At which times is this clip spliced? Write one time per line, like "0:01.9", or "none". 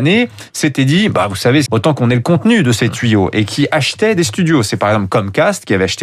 0:01.7